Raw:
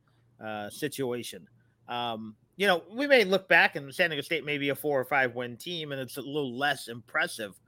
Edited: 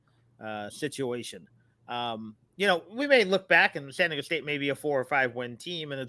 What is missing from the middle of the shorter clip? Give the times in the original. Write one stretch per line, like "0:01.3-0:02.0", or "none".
none